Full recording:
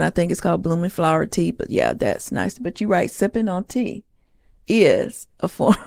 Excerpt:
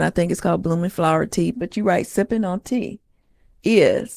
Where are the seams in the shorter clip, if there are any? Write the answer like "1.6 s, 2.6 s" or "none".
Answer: 1.5 s